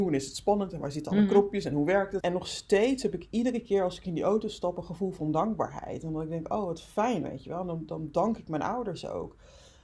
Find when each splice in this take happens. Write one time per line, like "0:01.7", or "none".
0:02.2